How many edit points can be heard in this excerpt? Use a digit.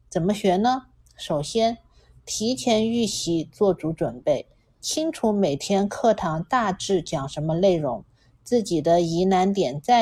0